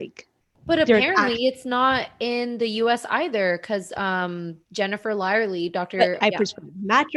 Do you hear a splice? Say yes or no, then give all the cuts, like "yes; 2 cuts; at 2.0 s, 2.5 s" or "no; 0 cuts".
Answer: yes; 2 cuts; at 4.6 s, 6.2 s